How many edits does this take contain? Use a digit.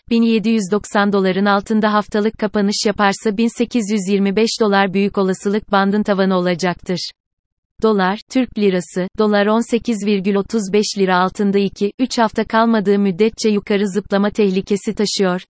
0